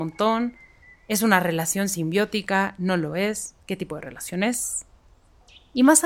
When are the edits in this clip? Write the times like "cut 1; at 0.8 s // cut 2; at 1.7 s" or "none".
none